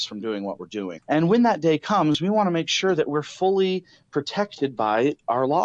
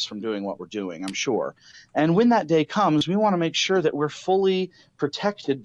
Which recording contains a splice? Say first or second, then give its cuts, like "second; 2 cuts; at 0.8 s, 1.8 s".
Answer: first; 1 cut; at 1.0 s